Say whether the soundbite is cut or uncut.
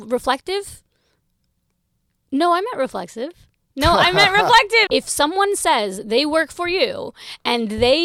cut